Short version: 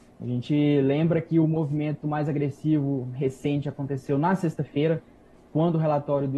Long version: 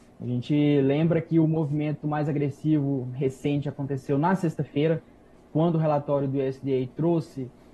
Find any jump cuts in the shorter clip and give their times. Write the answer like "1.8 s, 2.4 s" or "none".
none